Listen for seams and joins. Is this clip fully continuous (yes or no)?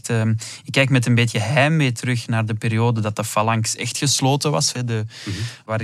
no